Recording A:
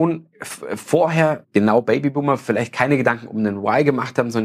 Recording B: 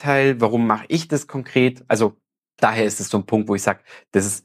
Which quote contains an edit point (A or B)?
A